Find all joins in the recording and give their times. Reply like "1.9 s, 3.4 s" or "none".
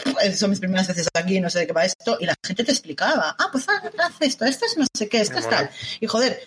none